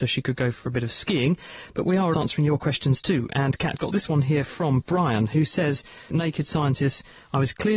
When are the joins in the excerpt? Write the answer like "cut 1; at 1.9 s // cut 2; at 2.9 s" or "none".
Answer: cut 1; at 2.1 s // cut 2; at 6.1 s